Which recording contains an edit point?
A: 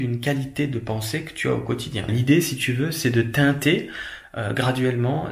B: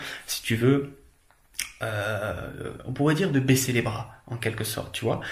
A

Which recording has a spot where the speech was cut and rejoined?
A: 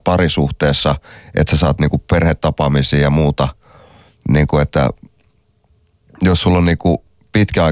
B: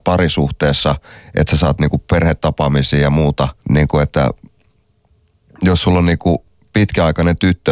B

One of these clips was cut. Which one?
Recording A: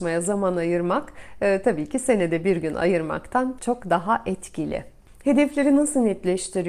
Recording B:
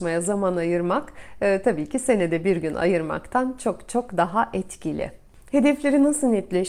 A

